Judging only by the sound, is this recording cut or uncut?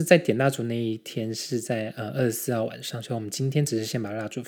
uncut